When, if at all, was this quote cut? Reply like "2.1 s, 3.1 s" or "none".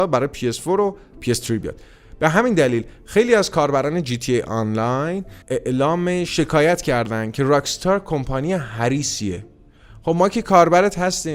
5.4 s